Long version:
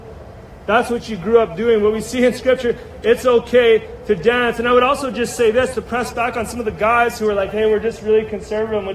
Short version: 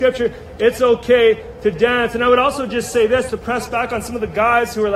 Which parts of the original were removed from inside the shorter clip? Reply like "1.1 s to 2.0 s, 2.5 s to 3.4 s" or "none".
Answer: none

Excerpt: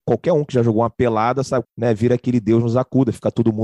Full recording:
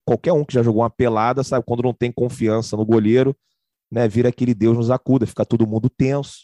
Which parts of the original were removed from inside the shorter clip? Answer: 1.6 s to 3.8 s

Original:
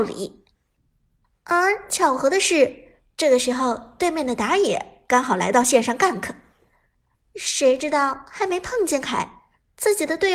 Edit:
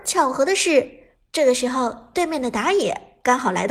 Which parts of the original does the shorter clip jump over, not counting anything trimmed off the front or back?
none

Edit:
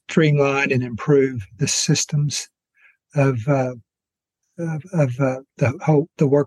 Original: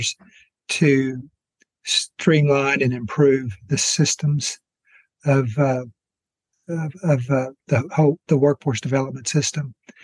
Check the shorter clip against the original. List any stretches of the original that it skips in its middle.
none

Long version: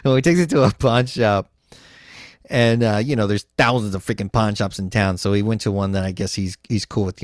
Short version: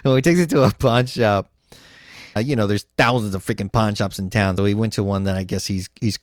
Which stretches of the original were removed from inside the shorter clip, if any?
2.4 s to 3.0 s, 5.2 s to 5.3 s

